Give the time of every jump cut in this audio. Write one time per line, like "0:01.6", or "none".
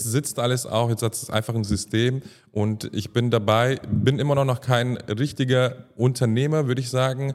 none